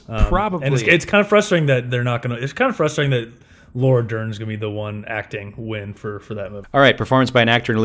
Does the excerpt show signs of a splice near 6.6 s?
yes; 1 cut; at 6.6 s

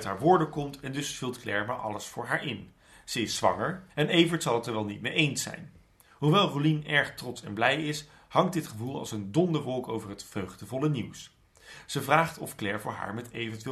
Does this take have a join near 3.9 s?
yes; 1 cut; at 3.9 s

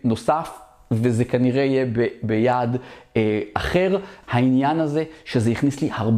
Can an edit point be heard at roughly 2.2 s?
no; 1 cut; at 4.2 s

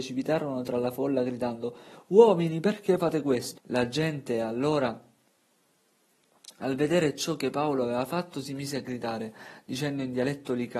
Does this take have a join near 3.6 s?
yes; 1 cut; at 3.6 s

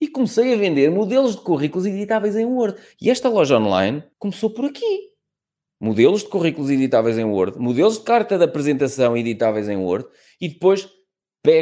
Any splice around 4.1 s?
yes; 1 cut; at 4.1 s

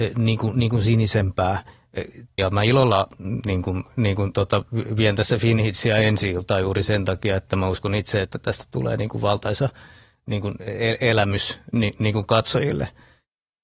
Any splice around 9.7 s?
no; 1 cut; at 2.4 s

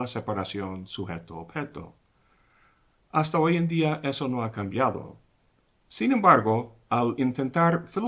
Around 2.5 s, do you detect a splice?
no; 0 cuts

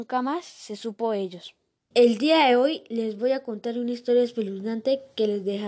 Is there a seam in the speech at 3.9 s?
no; 1 cut; at 1.9 s

